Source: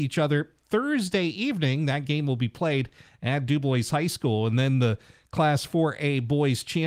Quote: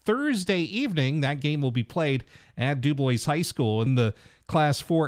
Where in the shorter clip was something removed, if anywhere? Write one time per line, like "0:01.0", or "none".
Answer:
0:03.9